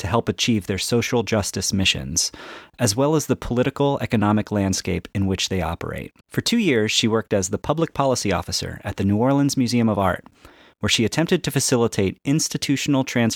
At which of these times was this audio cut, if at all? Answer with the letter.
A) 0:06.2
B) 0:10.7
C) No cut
A